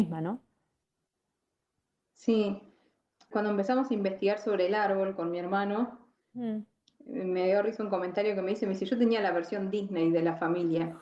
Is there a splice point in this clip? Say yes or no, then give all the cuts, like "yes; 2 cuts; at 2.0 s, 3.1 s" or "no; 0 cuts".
yes; 1 cut; at 3.3 s